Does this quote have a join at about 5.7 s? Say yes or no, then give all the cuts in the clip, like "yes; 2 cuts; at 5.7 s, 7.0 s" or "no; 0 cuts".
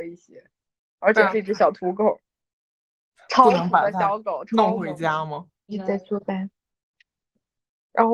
yes; 1 cut; at 5.7 s